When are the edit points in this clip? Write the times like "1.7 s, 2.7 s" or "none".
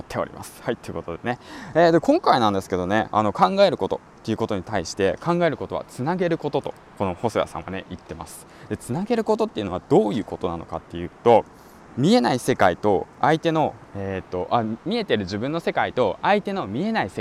11.9 s